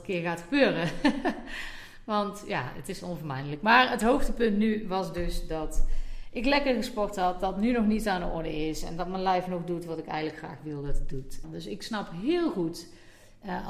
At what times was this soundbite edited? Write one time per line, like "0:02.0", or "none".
0:11.4

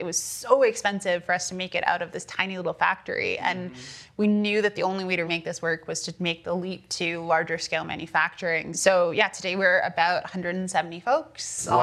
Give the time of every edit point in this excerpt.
0:05.3
0:08.7

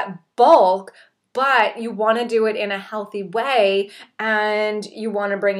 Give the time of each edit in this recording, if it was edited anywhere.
none

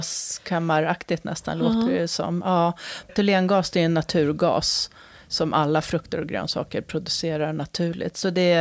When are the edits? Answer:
0:03.1

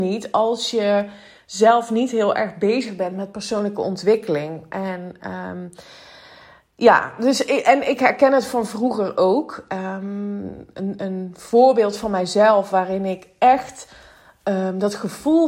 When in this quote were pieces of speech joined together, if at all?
0:11.0

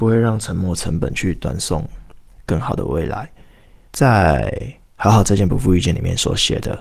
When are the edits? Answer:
0:03.9

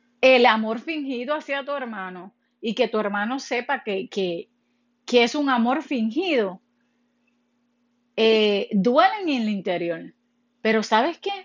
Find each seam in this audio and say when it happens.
none

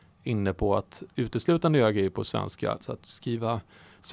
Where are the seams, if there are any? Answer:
0:01.1
0:02.8

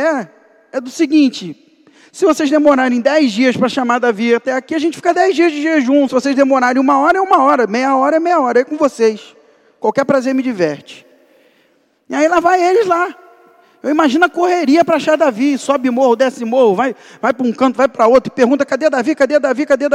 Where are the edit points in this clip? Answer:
0:06.1

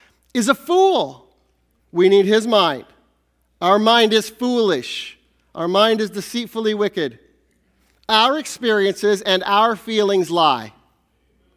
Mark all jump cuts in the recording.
0:01.8

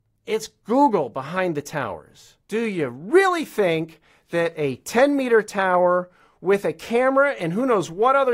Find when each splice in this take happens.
0:02.4

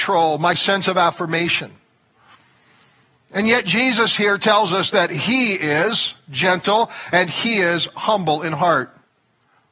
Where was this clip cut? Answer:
none

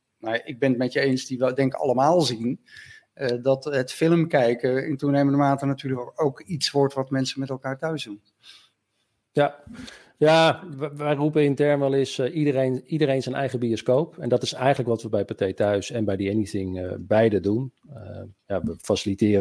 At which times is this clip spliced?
0:18.4

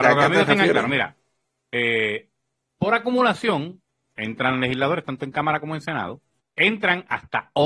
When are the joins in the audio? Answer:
0:06.4

